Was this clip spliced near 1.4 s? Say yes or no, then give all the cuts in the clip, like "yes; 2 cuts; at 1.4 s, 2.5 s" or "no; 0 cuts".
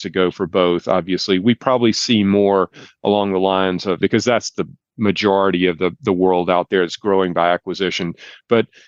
no; 1 cut; at 4.0 s